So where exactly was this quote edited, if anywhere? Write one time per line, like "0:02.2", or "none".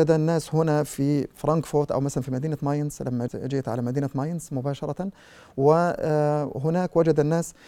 0:03.3